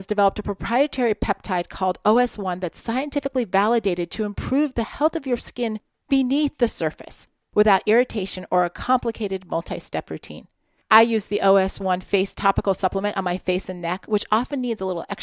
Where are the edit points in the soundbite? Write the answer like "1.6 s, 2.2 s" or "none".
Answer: none